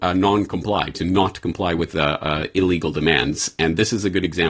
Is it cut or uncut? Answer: uncut